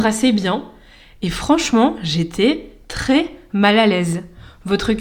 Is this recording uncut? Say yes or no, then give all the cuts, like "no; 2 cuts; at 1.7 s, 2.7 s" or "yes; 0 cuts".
yes; 0 cuts